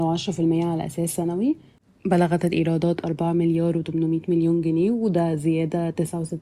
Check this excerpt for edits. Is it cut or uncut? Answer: uncut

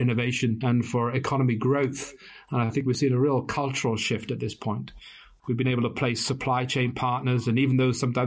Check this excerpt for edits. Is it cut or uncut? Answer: uncut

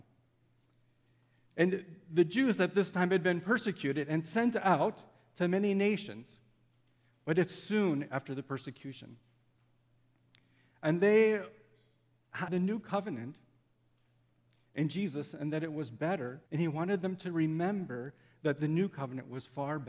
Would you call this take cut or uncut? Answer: cut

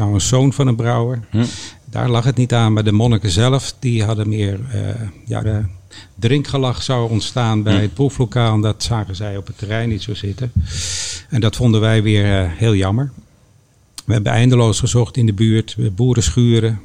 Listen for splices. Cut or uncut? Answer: cut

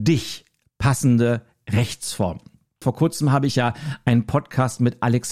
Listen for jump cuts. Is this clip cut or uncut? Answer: cut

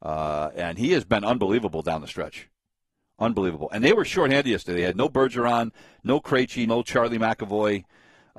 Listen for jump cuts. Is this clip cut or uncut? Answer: cut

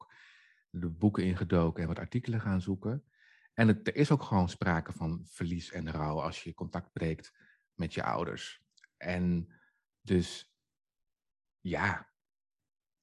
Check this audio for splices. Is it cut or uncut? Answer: uncut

